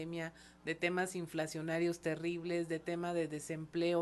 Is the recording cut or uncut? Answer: uncut